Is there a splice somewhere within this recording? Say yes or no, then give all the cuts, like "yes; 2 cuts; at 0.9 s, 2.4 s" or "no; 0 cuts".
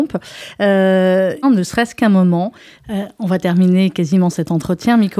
yes; 2 cuts; at 1.4 s, 2.8 s